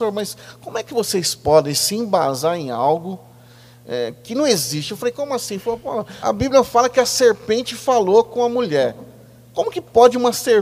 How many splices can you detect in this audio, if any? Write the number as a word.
one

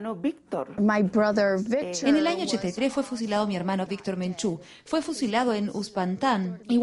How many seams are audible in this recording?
one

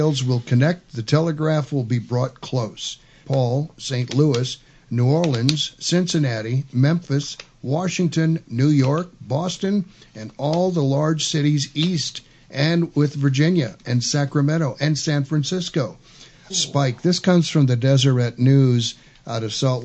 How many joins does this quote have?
two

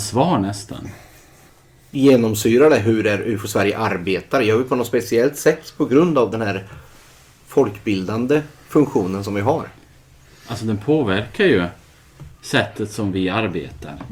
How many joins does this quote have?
one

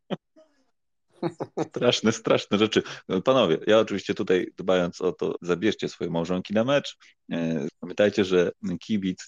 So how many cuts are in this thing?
two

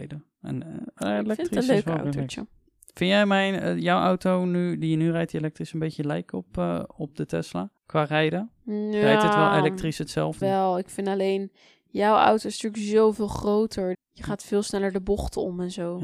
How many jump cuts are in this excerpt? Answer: three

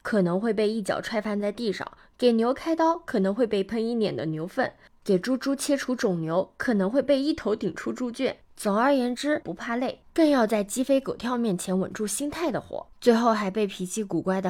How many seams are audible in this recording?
two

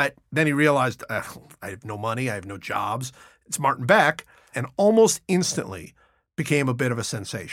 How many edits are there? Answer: one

